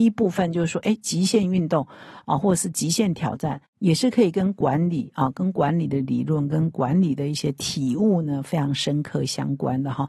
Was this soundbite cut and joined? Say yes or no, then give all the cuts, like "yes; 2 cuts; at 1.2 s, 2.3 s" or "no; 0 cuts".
no; 0 cuts